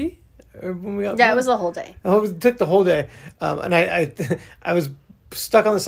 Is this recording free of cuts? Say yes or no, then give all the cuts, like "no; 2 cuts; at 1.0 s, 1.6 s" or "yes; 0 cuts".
yes; 0 cuts